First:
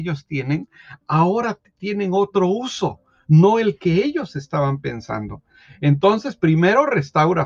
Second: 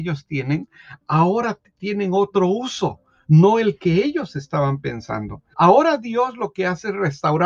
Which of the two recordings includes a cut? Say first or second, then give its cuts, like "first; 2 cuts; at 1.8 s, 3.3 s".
second; 1 cut; at 5.5 s